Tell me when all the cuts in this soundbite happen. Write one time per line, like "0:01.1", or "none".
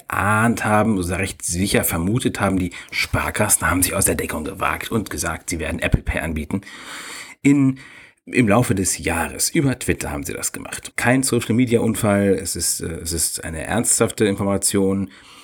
0:10.9